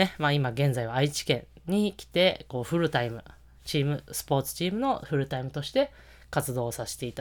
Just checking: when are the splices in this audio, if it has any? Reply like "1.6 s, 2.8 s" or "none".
none